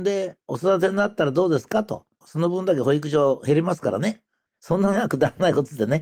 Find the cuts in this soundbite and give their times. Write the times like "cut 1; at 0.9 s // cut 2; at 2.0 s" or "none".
cut 1; at 2.2 s // cut 2; at 4.5 s